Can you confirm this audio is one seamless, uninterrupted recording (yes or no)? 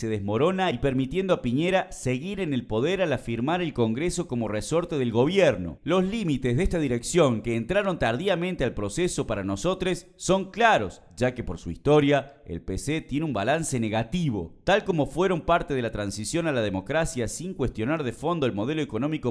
no